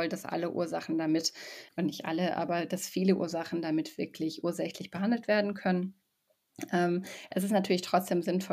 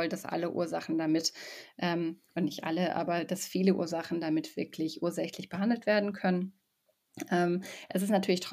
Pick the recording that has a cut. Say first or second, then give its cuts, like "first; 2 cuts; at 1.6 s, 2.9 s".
first; 1 cut; at 1.7 s